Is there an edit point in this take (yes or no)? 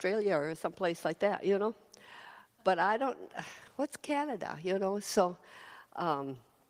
no